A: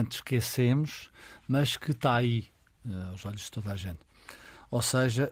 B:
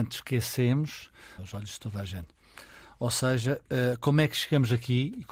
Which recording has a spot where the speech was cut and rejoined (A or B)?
B